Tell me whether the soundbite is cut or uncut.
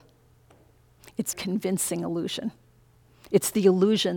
cut